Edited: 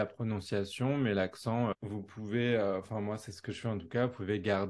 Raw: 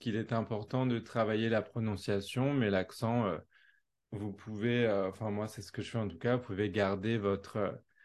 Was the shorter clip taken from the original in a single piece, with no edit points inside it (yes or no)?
no